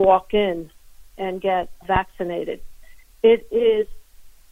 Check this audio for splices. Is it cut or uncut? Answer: cut